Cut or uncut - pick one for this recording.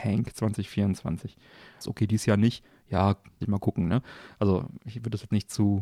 cut